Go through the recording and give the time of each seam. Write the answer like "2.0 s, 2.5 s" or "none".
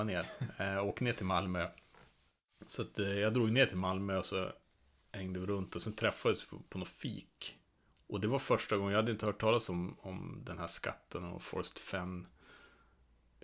none